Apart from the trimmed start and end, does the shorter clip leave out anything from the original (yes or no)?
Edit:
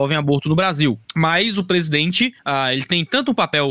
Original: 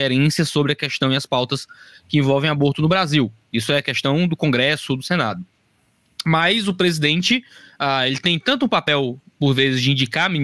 yes